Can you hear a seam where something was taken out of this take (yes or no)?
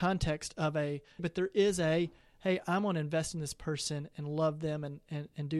yes